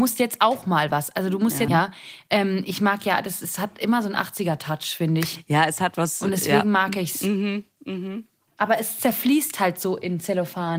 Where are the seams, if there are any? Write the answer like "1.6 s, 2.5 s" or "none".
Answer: 1.7 s